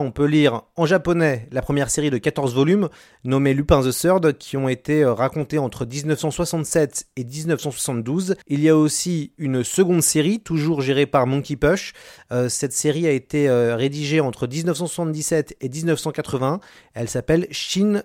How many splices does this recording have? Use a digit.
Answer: 1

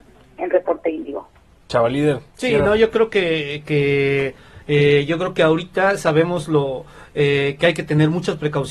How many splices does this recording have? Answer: 1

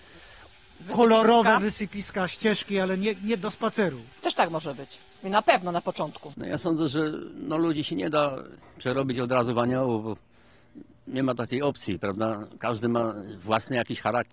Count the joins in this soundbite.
0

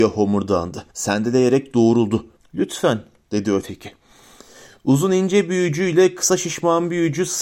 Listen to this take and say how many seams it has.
2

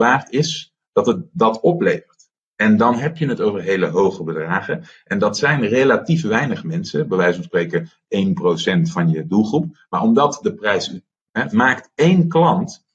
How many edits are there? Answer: 1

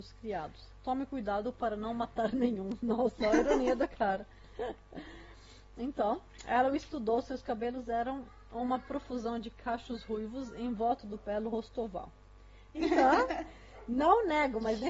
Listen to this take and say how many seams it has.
1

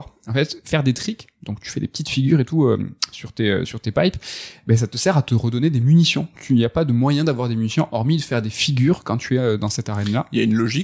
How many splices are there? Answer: 0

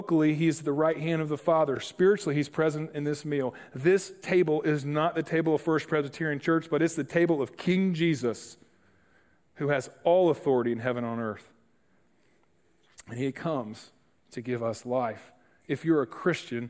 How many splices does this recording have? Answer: 0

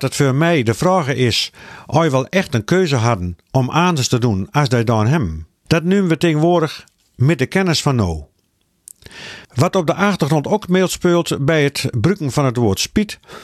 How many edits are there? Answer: 2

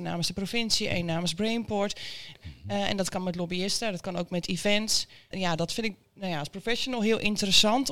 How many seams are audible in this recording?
2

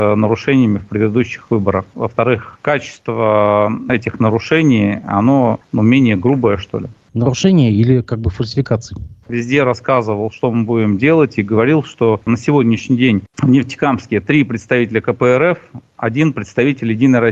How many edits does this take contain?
2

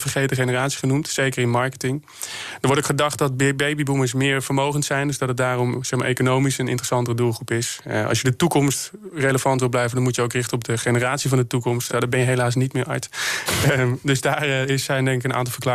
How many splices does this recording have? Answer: 0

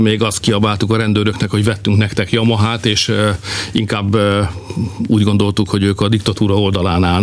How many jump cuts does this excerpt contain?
0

